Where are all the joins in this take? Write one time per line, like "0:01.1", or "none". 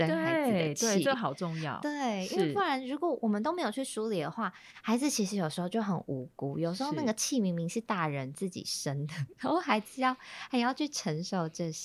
none